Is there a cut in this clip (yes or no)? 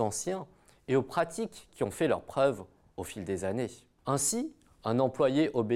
yes